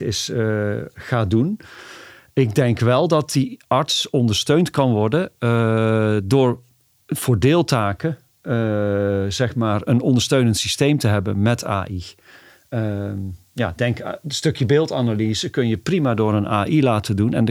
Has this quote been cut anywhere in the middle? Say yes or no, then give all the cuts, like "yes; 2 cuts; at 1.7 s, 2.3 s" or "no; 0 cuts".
no; 0 cuts